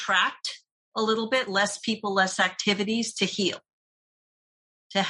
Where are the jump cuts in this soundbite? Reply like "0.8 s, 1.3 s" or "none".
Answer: none